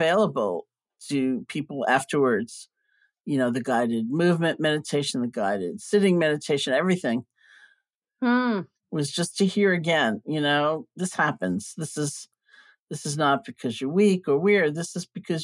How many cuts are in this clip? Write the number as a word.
one